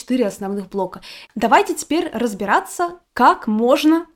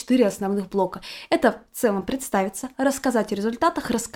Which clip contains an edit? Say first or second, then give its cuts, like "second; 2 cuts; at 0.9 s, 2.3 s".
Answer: first; 1 cut; at 1.3 s